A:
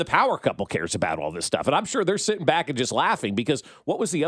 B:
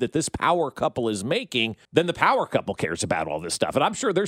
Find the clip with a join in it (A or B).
B